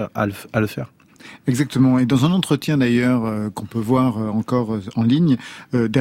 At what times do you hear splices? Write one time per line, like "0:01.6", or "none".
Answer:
none